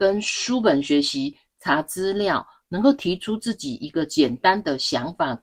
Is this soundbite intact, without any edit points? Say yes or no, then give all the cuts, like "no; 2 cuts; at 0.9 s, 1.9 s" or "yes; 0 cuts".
yes; 0 cuts